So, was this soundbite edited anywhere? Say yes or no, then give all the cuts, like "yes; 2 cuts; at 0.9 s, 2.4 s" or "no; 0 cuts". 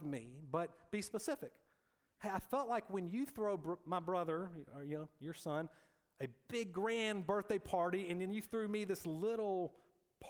no; 0 cuts